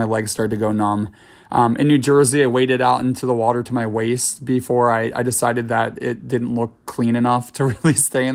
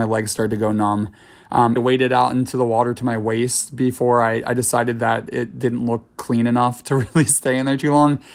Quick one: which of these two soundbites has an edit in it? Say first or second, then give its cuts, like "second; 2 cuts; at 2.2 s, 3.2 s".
second; 1 cut; at 1.8 s